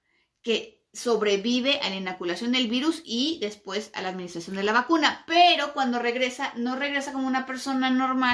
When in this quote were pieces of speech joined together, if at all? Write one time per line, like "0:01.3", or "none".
none